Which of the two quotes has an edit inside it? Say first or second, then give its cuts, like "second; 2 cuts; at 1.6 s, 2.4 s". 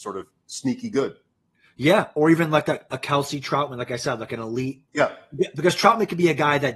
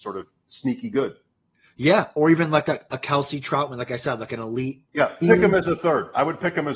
second; 1 cut; at 5.2 s